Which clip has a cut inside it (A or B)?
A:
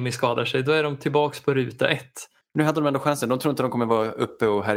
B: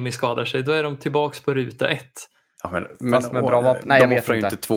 A